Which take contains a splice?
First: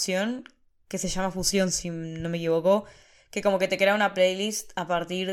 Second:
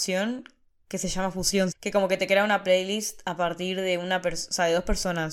second; 1 cut; at 1.7 s

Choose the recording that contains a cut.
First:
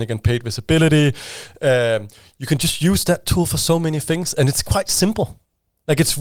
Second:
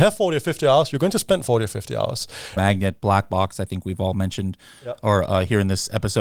second; 1 cut; at 2.6 s

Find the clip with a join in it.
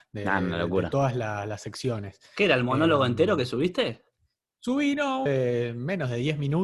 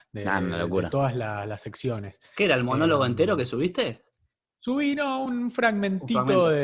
first; 1 cut; at 5.3 s

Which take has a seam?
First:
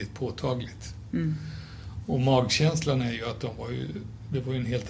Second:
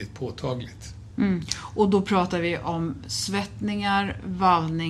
second; 1 cut; at 1.1 s

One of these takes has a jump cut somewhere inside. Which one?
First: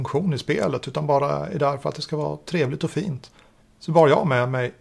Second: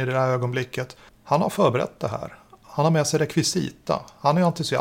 second; 1 cut; at 1.1 s

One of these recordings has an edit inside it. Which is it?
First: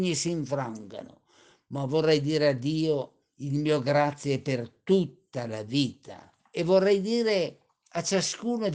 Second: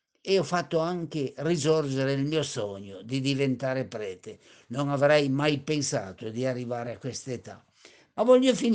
first; 1 cut; at 6.4 s

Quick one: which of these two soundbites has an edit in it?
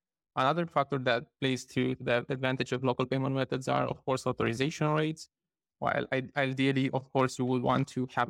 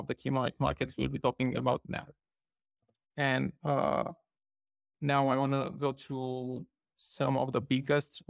first; 1 cut; at 5.7 s

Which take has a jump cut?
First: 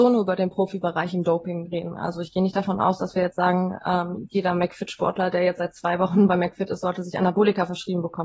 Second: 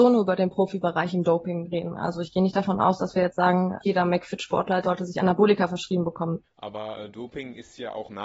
second; 3 cuts; at 3.8 s, 4.8 s, 6.4 s

